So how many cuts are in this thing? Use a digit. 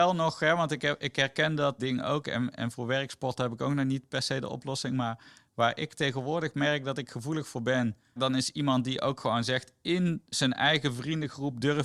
2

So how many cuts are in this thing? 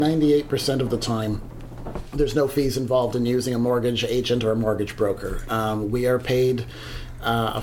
0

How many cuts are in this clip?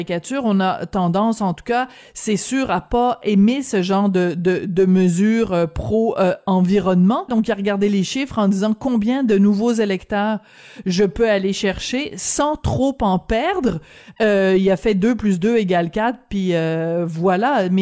1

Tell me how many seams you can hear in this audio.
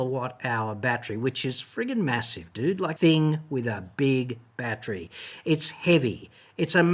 1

